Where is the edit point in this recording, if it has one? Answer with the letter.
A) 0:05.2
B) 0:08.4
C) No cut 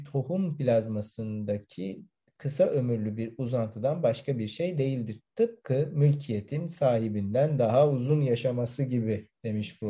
C